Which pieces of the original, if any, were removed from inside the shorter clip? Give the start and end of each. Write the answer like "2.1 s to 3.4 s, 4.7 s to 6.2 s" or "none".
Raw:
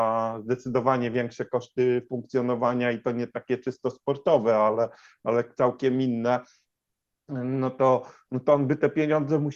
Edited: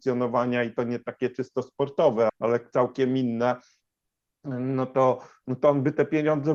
4.6 s to 5.1 s